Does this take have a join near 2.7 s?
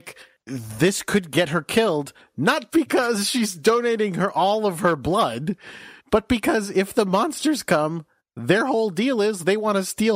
yes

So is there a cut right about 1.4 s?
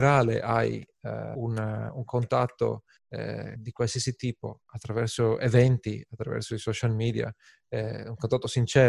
no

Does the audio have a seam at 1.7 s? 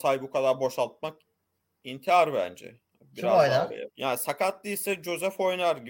no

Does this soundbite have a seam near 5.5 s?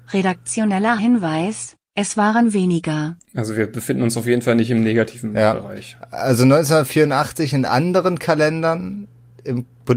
no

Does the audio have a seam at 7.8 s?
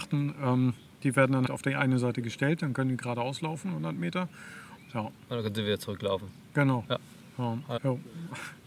yes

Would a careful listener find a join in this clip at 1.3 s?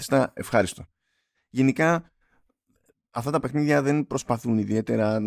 yes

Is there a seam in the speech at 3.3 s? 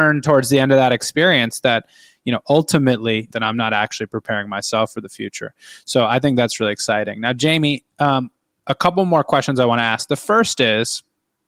yes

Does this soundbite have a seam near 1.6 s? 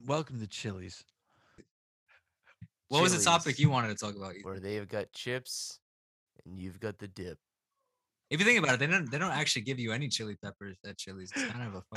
yes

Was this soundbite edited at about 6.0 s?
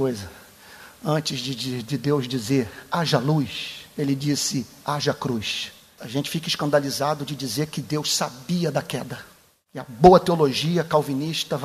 yes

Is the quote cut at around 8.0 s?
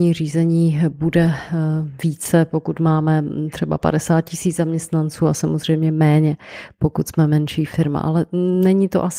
no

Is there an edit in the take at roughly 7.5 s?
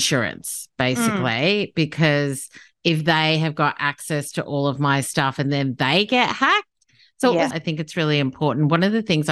yes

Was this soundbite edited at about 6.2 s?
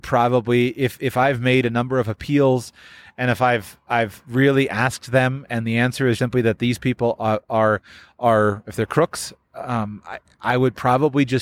yes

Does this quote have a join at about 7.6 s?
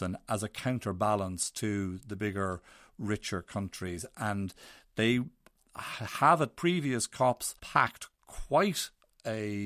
yes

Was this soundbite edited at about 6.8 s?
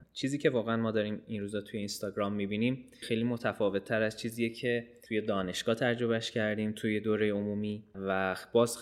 no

